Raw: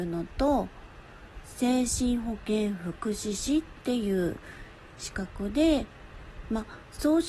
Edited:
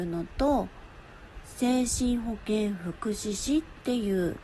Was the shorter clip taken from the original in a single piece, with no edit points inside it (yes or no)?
yes